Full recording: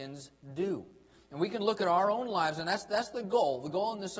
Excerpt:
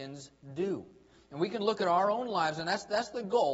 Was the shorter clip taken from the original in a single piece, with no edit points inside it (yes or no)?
yes